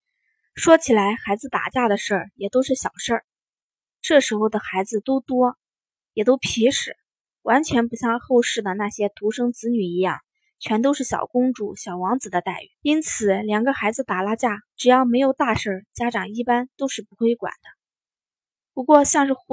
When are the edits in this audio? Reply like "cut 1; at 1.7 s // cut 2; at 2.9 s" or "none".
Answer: cut 1; at 12.7 s // cut 2; at 14.7 s